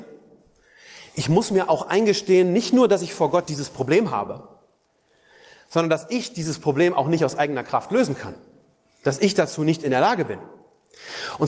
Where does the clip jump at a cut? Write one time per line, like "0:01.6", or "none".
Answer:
none